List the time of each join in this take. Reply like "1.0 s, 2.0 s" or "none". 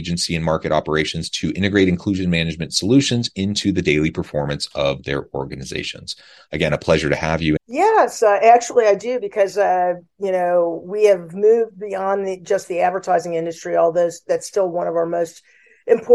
7.6 s